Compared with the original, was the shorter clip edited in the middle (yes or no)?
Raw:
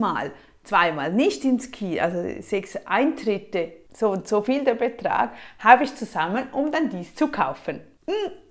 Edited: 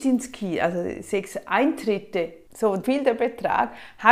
yes